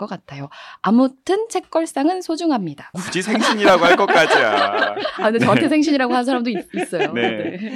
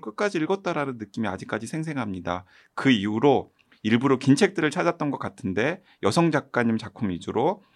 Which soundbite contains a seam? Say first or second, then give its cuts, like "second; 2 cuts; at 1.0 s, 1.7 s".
first; 1 cut; at 2.9 s